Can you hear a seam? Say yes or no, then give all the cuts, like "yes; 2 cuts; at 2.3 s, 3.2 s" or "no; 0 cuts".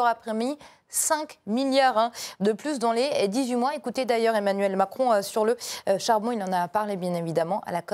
no; 0 cuts